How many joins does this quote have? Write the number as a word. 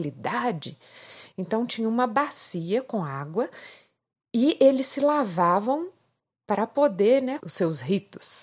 two